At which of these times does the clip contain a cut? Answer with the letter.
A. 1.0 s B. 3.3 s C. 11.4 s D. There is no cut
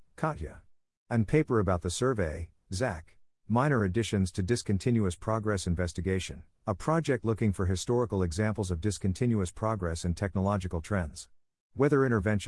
B